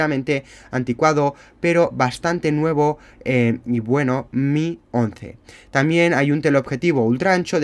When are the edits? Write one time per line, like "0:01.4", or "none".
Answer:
none